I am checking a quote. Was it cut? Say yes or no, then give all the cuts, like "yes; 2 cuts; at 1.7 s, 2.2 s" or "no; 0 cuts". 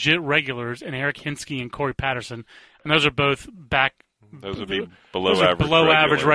no; 0 cuts